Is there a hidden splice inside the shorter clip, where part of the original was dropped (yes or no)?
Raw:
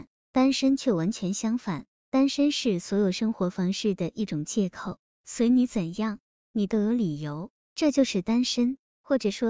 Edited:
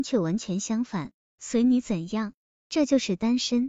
yes